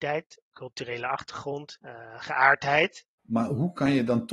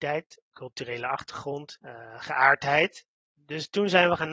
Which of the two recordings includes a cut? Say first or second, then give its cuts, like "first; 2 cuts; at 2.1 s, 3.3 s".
first; 1 cut; at 3.2 s